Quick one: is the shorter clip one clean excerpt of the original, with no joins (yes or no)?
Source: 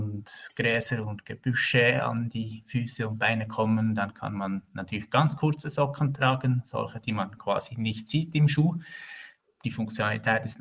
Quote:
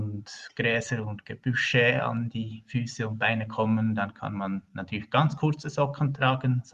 yes